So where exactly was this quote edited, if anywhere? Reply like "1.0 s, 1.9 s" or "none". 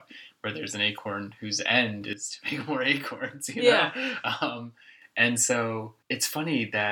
6.0 s